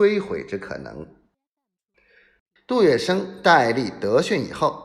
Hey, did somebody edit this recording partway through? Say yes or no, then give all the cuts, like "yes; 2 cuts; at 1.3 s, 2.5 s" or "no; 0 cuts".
yes; 1 cut; at 2.6 s